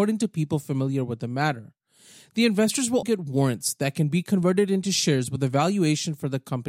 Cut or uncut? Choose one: cut